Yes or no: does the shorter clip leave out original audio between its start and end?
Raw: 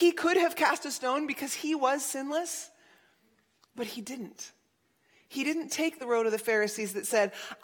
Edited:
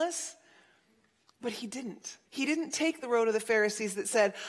yes